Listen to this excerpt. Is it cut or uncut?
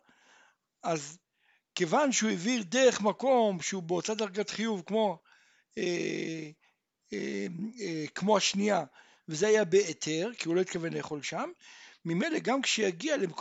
uncut